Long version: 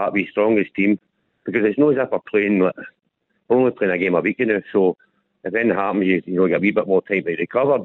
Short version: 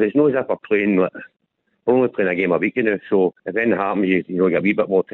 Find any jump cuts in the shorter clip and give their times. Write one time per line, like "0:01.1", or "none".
0:03.4